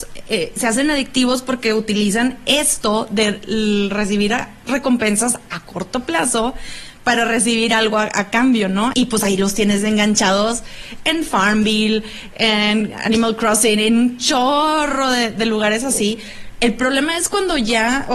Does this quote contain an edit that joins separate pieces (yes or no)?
yes